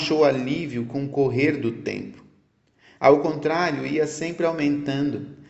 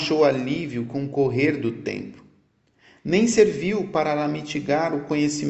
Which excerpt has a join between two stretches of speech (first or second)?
second